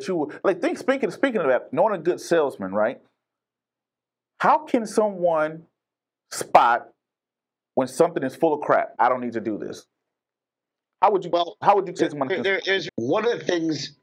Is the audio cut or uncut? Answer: cut